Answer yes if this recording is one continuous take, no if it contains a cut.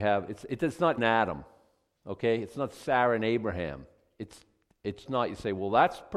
no